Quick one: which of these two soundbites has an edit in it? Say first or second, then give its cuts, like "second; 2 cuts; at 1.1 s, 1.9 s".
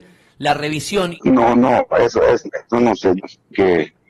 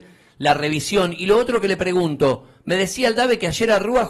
first; 2 cuts; at 1.2 s, 3.2 s